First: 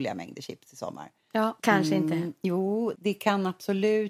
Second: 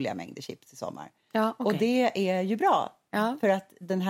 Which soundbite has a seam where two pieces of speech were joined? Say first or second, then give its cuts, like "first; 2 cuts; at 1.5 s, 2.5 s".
first; 2 cuts; at 1.6 s, 2.9 s